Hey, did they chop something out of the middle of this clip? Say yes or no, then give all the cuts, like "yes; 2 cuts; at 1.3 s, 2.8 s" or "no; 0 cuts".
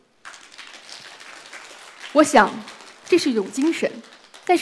no; 0 cuts